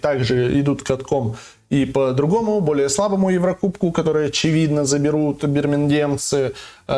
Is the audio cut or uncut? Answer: uncut